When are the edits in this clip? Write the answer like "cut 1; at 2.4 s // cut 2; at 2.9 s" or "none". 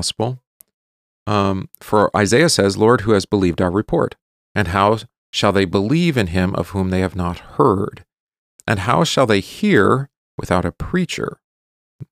cut 1; at 4.5 s